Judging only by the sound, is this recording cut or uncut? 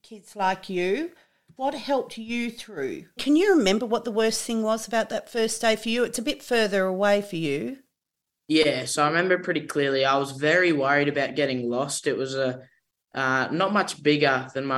cut